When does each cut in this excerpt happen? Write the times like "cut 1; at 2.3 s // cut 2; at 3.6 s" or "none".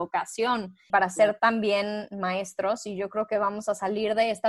cut 1; at 0.9 s